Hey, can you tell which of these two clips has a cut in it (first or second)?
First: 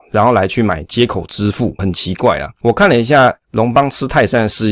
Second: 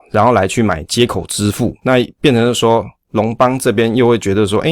first